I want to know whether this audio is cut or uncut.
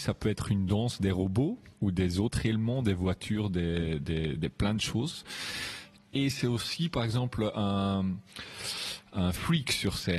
cut